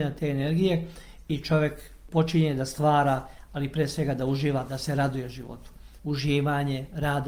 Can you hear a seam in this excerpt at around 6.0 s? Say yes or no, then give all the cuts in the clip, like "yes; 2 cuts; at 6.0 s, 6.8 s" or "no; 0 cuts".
yes; 1 cut; at 6.0 s